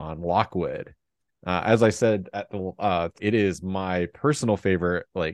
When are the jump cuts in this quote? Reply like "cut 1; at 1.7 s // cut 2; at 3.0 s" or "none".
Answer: cut 1; at 1.3 s // cut 2; at 3.2 s

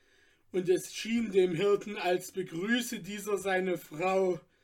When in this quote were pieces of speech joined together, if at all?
none

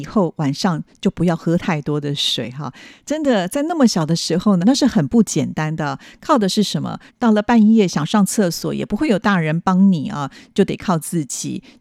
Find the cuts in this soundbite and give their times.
cut 1; at 4.6 s // cut 2; at 7.1 s

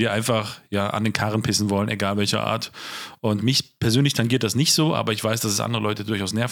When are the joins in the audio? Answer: none

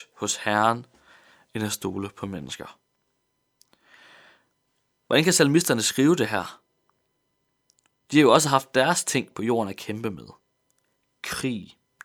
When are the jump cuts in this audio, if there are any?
none

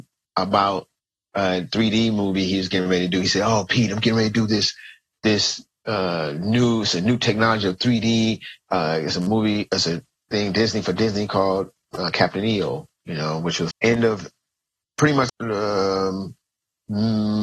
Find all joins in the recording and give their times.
cut 1; at 13.7 s // cut 2; at 15.3 s

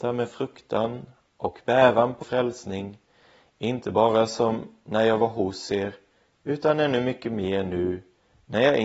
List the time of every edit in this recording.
cut 1; at 2.2 s

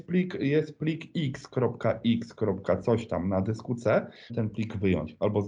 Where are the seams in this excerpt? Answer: cut 1; at 4.3 s

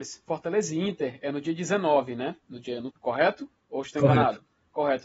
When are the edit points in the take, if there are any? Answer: cut 1; at 2.9 s

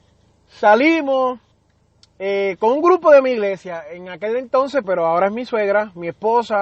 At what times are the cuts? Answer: cut 1; at 4.8 s

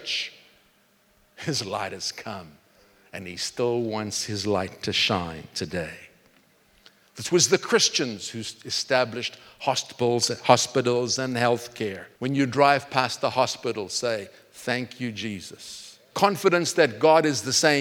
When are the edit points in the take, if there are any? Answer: cut 1; at 7.0 s // cut 2; at 12.1 s // cut 3; at 16.1 s

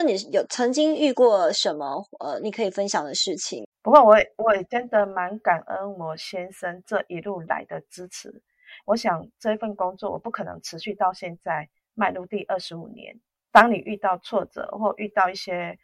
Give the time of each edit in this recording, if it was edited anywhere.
cut 1; at 3.7 s // cut 2; at 8.8 s

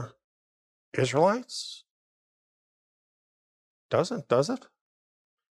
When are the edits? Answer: none

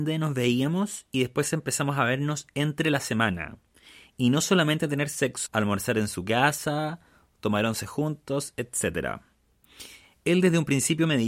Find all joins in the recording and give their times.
cut 1; at 5.5 s

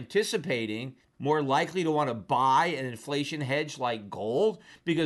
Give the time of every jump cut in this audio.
cut 1; at 1.1 s

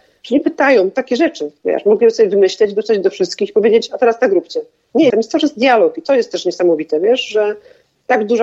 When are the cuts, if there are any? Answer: cut 1; at 5.1 s

